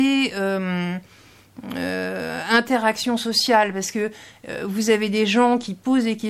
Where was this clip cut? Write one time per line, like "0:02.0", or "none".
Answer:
none